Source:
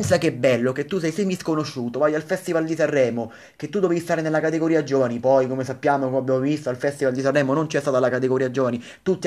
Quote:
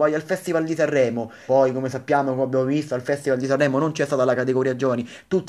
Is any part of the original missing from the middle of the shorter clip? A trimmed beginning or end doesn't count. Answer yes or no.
yes